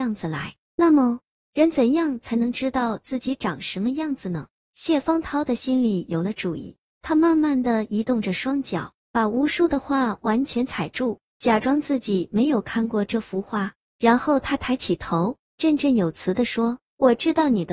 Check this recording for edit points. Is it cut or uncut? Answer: uncut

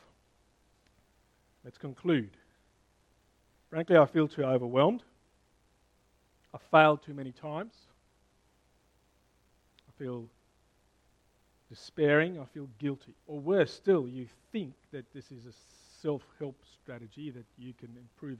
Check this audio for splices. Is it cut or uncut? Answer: cut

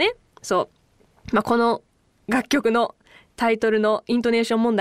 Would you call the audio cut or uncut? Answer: uncut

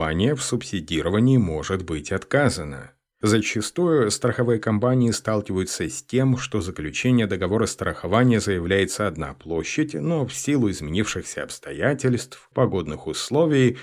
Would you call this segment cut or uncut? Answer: cut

